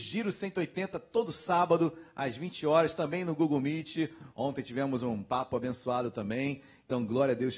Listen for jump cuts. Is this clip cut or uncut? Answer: cut